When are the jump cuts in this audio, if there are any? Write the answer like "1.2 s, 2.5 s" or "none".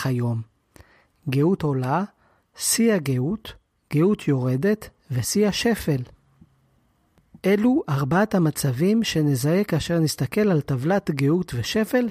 none